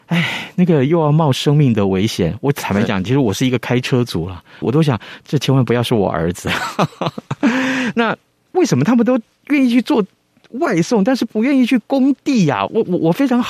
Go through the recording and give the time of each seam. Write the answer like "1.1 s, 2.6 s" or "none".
4.6 s